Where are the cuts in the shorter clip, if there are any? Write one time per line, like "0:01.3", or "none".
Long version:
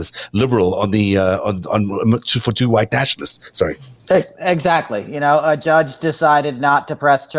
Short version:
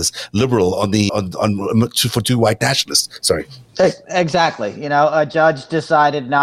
0:01.1